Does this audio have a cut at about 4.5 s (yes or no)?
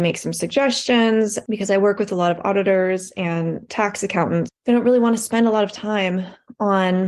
yes